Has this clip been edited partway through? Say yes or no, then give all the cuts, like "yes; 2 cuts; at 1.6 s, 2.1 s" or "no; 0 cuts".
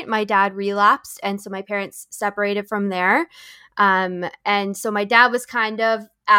no; 0 cuts